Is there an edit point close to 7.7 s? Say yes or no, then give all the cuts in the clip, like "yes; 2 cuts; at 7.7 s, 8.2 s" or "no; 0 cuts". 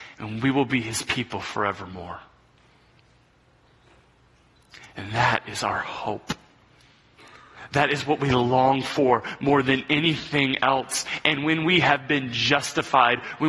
no; 0 cuts